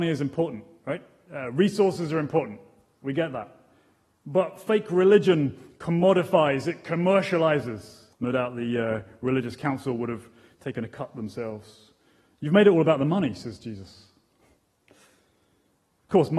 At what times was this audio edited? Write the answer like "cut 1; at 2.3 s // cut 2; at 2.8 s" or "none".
cut 1; at 8.1 s